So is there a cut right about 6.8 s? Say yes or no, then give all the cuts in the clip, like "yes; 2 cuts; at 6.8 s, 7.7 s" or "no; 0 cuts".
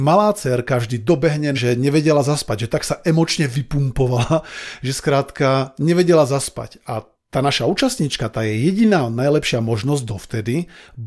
no; 1 cut; at 1.5 s